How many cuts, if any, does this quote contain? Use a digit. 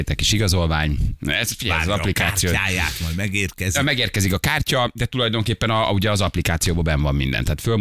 0